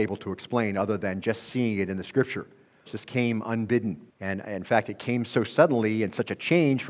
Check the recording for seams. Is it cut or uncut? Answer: cut